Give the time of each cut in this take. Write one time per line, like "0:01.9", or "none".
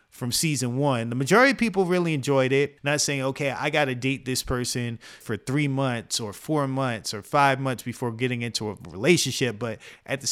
0:02.8
0:05.2

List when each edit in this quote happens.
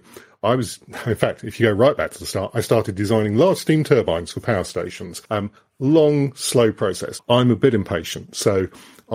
0:05.3
0:07.2

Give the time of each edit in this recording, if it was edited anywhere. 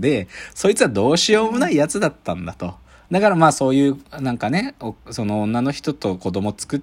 none

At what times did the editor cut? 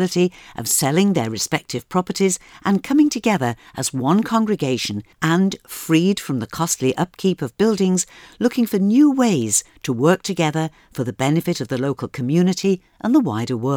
0:05.1

